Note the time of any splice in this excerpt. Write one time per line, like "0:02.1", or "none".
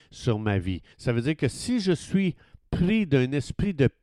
0:00.9